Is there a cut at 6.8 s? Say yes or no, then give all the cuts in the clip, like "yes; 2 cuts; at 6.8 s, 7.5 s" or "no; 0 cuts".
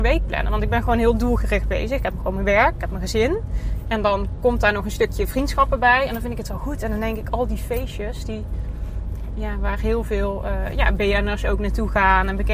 no; 0 cuts